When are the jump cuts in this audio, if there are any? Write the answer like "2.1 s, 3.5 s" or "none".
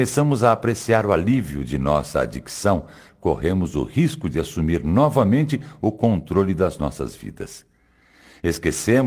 none